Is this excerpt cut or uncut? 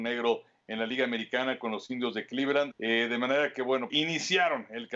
cut